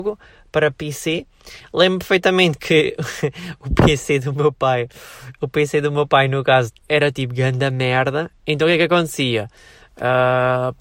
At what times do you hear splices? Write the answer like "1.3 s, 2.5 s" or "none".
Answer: 6.7 s